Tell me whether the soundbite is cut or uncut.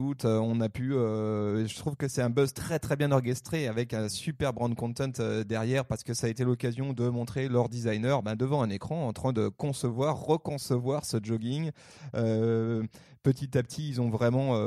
uncut